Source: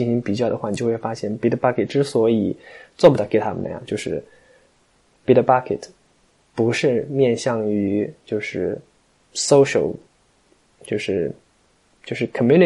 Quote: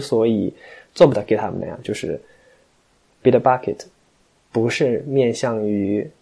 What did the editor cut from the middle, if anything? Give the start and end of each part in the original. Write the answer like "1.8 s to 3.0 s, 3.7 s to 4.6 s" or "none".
none